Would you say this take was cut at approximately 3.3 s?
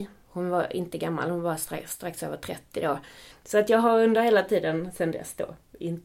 yes; 1 cut; at 3.3 s

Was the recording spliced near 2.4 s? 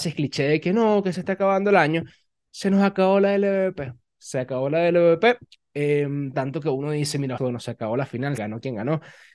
no; 3 cuts; at 6.3 s, 7.4 s, 8.4 s

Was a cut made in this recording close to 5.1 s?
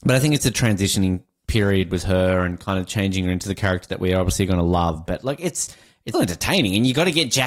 yes; 2 cuts; at 5.1 s, 6.1 s

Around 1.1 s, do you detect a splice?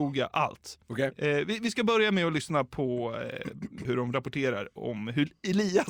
no; 1 cut; at 3.8 s

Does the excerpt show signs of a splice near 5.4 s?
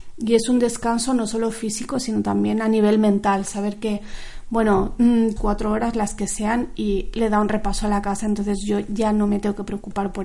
yes; 1 cut; at 5.4 s

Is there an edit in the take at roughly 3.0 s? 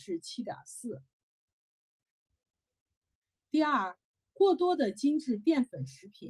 no; 0 cuts

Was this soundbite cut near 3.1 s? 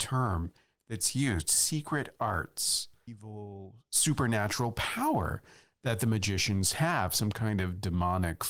yes; 1 cut; at 3.1 s

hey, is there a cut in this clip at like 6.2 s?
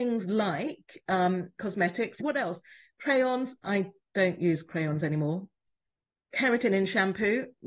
no; 1 cut; at 2.2 s

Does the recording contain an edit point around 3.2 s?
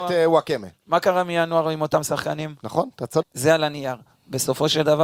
yes; 1 cut; at 3.2 s

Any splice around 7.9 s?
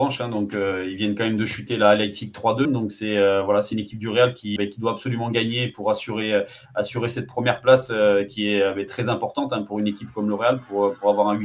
no; 2 cuts; at 2.6 s, 4.6 s

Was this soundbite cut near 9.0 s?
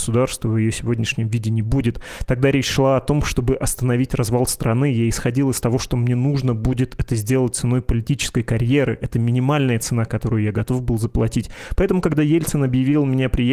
no; 0 cuts

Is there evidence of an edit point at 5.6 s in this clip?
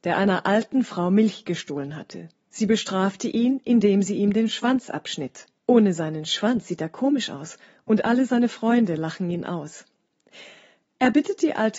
yes; 1 cut; at 5.6 s

